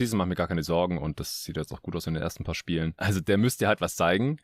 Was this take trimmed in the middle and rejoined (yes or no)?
yes